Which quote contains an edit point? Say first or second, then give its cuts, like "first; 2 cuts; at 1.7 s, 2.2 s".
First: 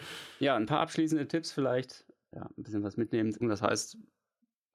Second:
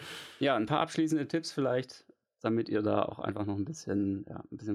first; 2 cuts; at 2.3 s, 3.4 s